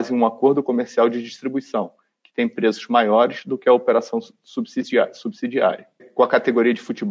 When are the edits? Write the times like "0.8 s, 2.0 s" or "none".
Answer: 6.0 s